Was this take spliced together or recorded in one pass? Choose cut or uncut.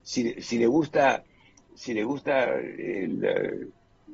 uncut